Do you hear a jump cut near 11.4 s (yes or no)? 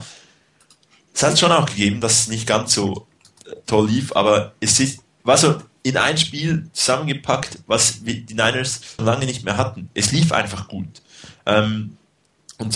no